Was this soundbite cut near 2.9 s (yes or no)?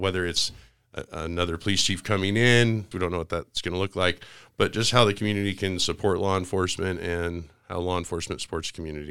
yes